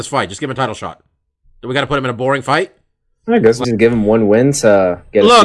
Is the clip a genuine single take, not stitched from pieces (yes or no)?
no